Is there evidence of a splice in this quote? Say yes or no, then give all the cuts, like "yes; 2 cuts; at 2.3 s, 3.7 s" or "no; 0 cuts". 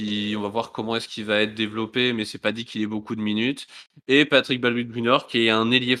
no; 0 cuts